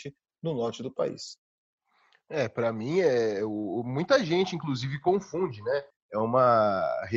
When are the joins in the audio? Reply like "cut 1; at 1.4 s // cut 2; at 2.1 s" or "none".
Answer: cut 1; at 5.9 s